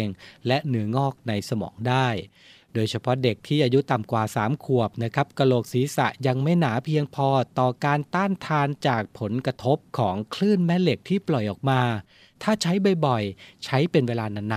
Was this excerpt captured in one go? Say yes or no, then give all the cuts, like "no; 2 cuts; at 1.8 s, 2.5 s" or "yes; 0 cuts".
yes; 0 cuts